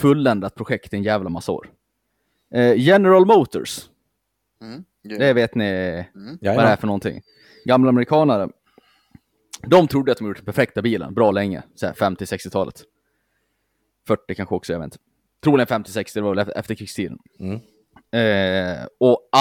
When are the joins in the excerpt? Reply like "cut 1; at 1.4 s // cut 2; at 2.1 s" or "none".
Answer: none